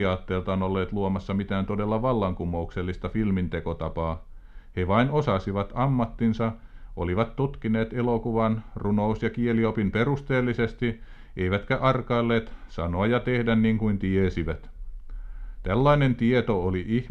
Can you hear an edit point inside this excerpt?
no; 0 cuts

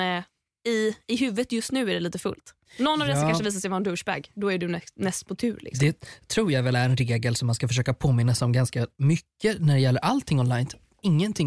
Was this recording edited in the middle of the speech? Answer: no; 0 cuts

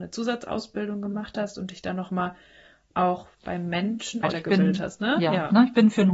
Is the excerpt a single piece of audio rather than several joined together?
no; 1 cut; at 4.2 s

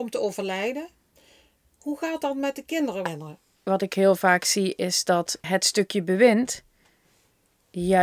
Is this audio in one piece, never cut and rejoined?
no; 2 cuts; at 3.1 s, 5.4 s

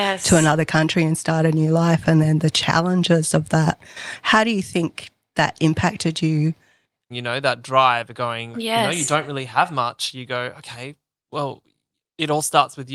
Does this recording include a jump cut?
yes; 2 cuts; at 7.1 s, 8.5 s

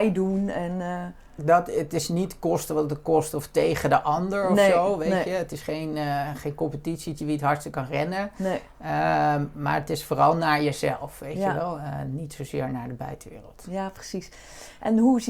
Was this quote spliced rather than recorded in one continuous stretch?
no; 0 cuts

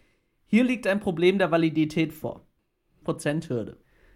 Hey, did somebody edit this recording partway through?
yes; 1 cut; at 3.0 s

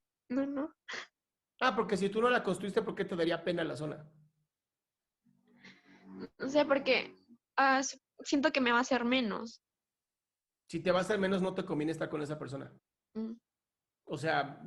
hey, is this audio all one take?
yes; 0 cuts

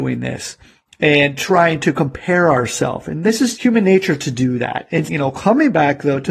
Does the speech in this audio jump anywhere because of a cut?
yes; 2 cuts; at 3.5 s, 5.1 s

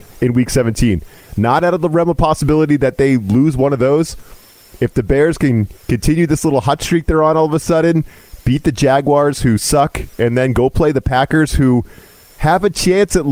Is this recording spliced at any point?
no; 0 cuts

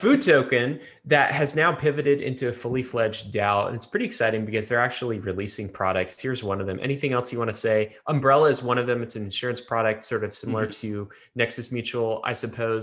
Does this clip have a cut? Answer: no; 0 cuts

